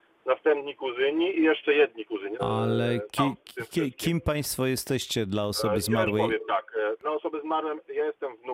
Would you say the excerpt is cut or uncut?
cut